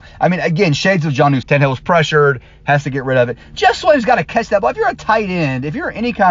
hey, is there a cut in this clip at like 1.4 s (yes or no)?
yes